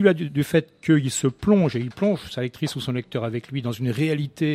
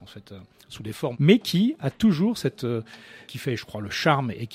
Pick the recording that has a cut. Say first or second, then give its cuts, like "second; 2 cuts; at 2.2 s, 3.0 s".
second; 2 cuts; at 1.1 s, 3.3 s